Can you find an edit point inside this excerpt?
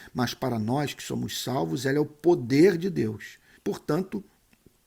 yes; 1 cut; at 3.6 s

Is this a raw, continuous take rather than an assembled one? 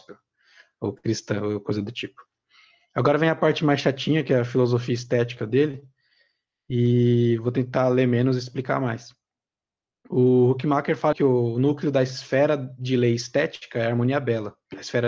no; 1 cut; at 11.1 s

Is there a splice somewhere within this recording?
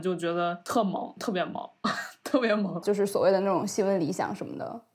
yes; 1 cut; at 2.8 s

